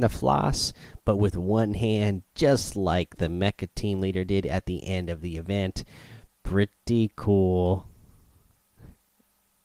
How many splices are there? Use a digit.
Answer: 0